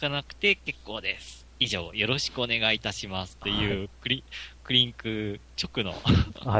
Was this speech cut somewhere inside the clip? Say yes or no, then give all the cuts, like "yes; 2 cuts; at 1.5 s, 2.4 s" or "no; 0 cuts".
no; 0 cuts